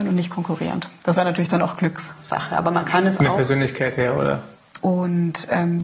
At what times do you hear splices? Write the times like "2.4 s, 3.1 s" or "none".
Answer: 4.8 s